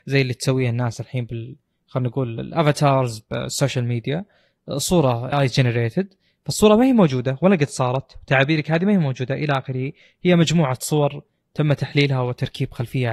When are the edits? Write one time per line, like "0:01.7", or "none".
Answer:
0:05.3